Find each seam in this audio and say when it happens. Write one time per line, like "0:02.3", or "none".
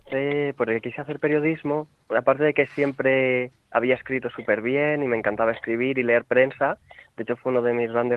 none